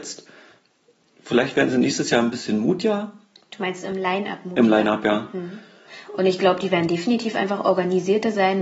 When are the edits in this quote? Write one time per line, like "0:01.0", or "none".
none